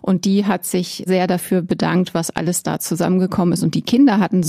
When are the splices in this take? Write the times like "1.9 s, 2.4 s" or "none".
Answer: 1.1 s

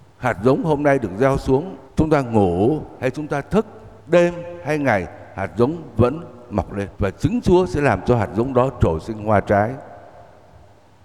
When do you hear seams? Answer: 1.9 s, 4.0 s, 6.9 s

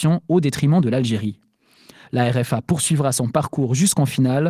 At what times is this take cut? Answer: none

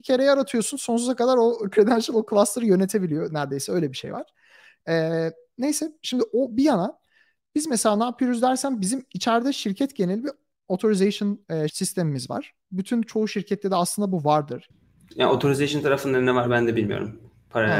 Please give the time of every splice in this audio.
11.7 s, 14.7 s

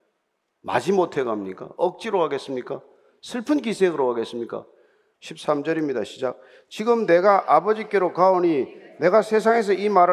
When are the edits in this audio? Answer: 5.1 s

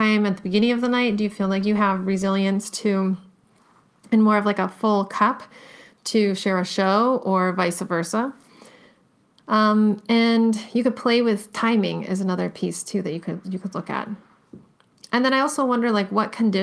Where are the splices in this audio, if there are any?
none

